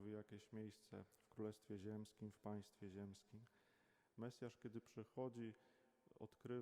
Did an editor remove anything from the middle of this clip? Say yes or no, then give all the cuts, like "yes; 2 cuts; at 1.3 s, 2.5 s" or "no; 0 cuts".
yes; 1 cut; at 4.1 s